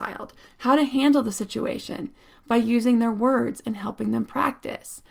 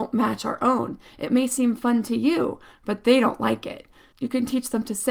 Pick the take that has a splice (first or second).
second